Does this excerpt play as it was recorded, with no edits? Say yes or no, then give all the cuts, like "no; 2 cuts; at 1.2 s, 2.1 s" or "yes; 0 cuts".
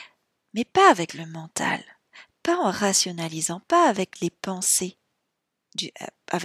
yes; 0 cuts